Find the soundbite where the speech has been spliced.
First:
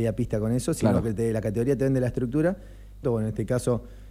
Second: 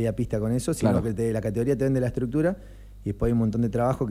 first; 1 cut; at 3.0 s

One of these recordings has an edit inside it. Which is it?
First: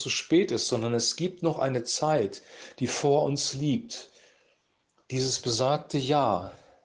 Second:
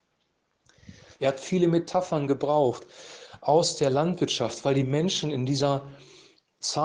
second; 1 cut; at 1.2 s

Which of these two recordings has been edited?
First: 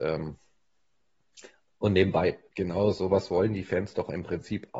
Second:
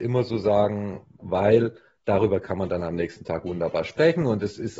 second; 1 cut; at 1.2 s

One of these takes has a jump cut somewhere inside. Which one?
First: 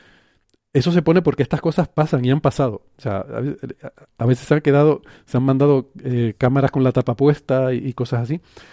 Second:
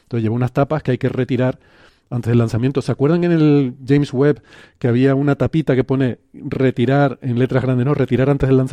first; 1 cut; at 1.9 s

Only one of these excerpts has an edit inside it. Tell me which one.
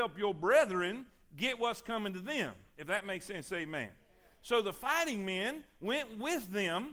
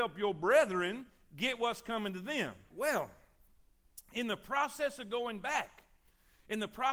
second; 1 cut; at 2.7 s

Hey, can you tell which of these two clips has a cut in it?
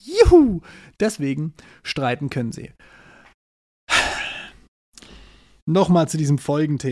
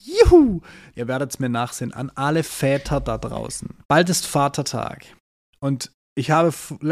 second; 2 cuts; at 0.9 s, 3.8 s

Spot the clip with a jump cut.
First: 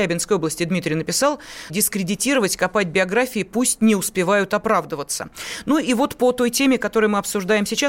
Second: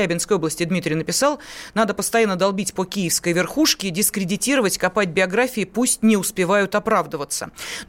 first; 1 cut; at 1.7 s

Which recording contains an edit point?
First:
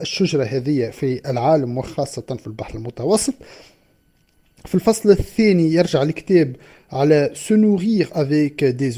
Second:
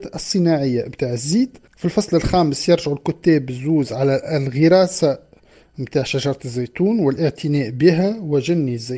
second; 1 cut; at 1.7 s

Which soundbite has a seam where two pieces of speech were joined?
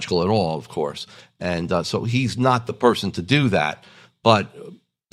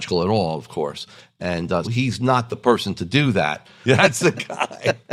second; 2 cuts; at 1.8 s, 3.8 s

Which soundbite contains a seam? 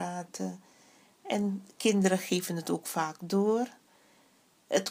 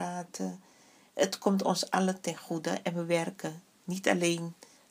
second; 1 cut; at 1.1 s

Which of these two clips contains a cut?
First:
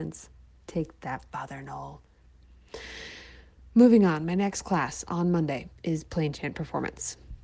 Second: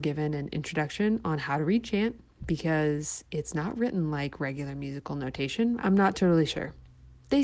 second; 1 cut; at 5.8 s

